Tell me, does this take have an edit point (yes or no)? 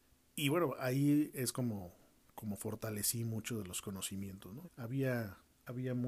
yes